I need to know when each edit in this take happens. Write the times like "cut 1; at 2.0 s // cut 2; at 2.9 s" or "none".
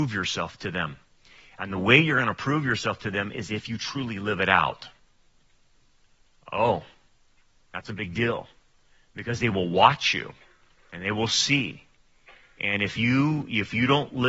none